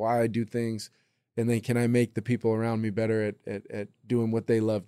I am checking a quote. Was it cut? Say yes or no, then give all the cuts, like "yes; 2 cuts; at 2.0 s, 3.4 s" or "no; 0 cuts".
no; 0 cuts